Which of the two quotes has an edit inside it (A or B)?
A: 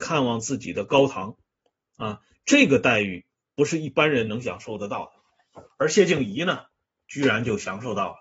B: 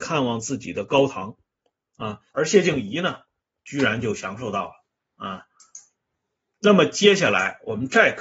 B